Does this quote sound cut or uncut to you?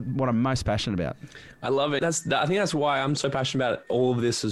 cut